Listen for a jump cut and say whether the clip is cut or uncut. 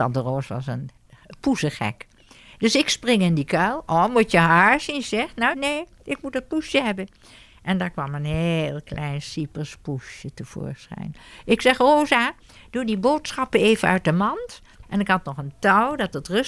cut